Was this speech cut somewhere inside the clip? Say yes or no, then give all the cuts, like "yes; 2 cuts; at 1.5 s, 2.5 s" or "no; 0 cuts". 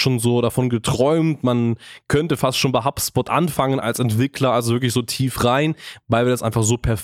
no; 0 cuts